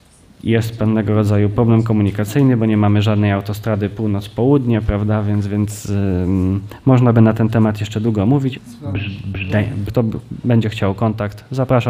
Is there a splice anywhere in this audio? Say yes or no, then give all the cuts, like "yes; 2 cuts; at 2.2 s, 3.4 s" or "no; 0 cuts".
yes; 2 cuts; at 8.5 s, 9.9 s